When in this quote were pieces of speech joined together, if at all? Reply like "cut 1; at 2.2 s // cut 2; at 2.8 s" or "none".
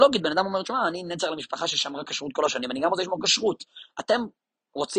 cut 1; at 3.9 s